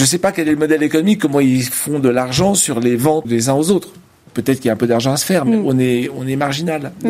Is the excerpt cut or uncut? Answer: cut